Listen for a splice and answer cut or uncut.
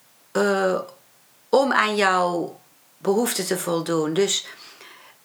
uncut